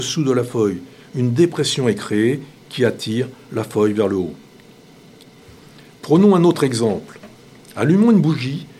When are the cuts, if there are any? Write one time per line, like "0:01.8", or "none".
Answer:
none